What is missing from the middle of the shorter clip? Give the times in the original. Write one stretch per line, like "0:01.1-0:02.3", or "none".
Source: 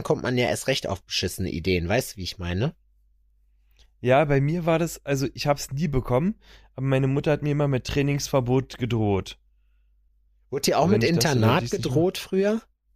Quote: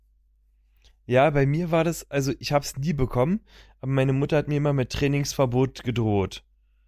none